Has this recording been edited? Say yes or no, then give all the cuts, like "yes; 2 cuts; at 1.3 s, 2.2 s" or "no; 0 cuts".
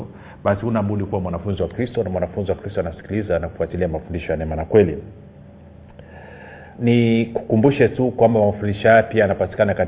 yes; 1 cut; at 6.7 s